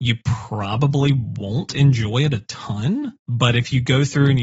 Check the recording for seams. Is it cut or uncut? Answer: cut